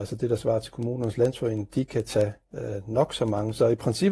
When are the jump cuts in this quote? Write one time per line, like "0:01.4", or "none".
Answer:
none